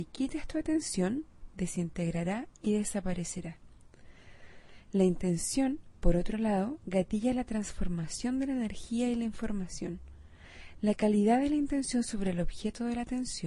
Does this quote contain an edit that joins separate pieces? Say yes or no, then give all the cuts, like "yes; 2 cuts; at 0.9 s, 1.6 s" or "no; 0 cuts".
yes; 2 cuts; at 1.5 s, 10.8 s